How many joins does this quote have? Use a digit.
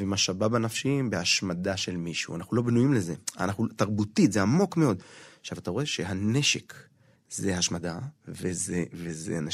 1